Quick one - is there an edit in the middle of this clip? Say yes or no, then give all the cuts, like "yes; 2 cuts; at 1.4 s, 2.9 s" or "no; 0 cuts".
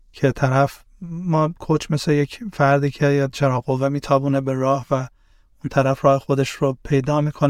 no; 0 cuts